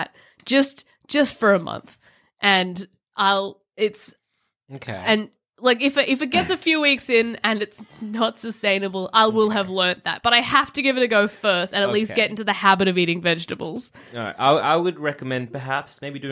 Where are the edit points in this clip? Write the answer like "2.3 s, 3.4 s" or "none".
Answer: none